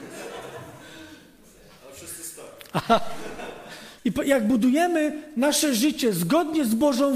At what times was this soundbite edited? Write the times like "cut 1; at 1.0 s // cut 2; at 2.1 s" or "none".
cut 1; at 4.0 s

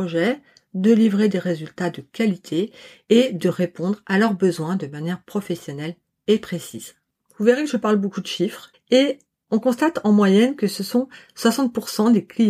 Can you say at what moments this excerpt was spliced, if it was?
cut 1; at 8.7 s

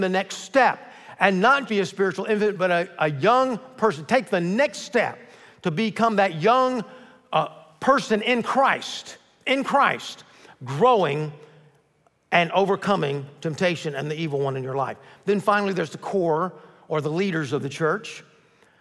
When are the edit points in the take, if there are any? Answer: cut 1; at 1.7 s

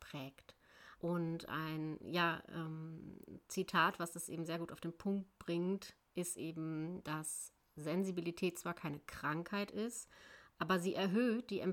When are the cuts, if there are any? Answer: cut 1; at 1.0 s

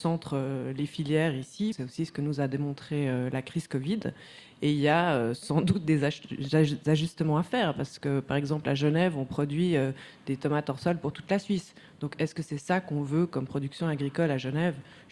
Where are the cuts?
cut 1; at 1.7 s

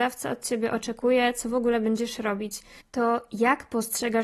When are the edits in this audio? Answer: cut 1; at 2.8 s

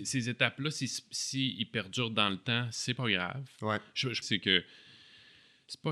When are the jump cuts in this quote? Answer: cut 1; at 4.2 s

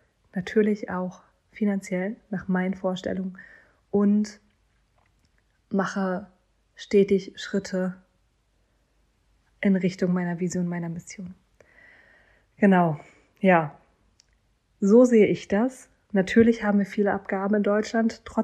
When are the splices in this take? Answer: none

